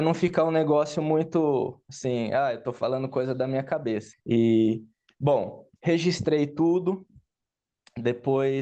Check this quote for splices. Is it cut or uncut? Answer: cut